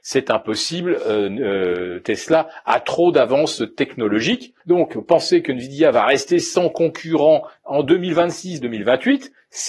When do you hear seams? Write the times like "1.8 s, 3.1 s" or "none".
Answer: 4.6 s, 8.6 s